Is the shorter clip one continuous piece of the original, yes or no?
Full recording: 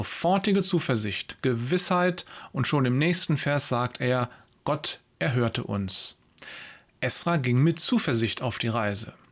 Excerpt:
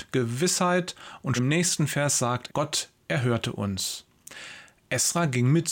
no